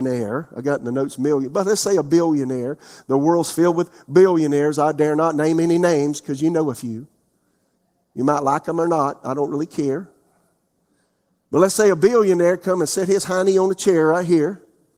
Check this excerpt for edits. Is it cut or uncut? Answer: uncut